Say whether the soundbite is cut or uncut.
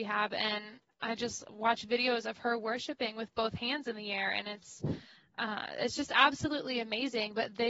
uncut